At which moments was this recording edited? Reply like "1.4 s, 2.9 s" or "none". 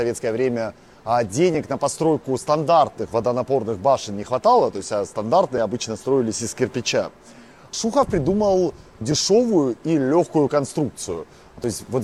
none